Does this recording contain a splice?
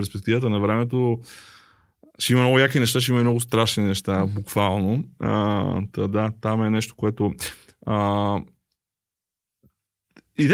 no; 0 cuts

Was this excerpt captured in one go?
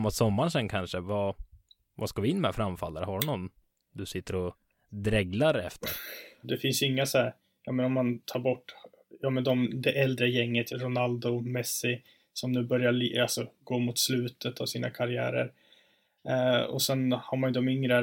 no; 2 cuts; at 6.4 s, 10.7 s

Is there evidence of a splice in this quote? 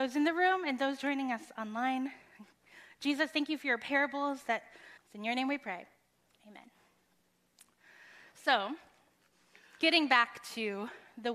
yes; 1 cut; at 5.0 s

